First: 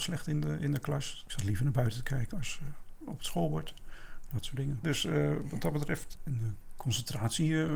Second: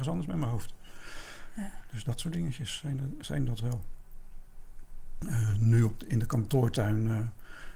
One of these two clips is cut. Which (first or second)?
first